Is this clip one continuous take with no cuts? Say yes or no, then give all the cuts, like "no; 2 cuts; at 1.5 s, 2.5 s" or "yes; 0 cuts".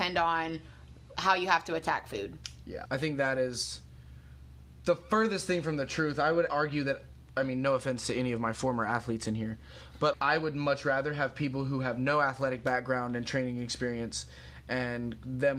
no; 3 cuts; at 2.9 s, 6.5 s, 10.1 s